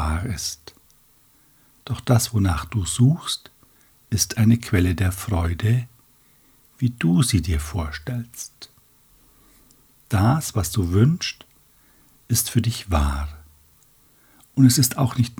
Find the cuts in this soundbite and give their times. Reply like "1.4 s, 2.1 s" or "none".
none